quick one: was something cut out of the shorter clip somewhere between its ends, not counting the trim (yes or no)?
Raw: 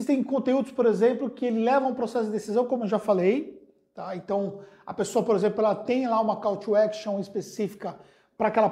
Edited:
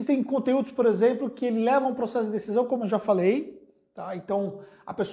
no